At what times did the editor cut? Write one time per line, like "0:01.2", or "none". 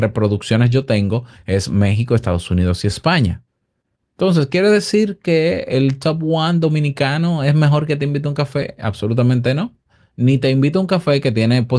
none